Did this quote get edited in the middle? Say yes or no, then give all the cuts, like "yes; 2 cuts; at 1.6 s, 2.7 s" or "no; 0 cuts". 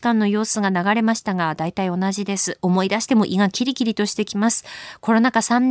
no; 0 cuts